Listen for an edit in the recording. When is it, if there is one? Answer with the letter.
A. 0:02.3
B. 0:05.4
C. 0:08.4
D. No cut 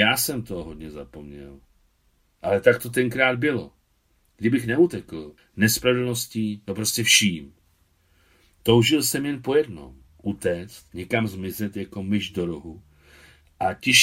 B